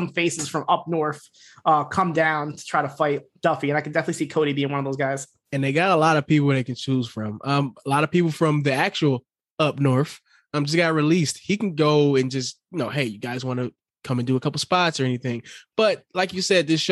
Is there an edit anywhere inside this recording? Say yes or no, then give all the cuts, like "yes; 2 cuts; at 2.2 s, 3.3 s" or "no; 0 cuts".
no; 0 cuts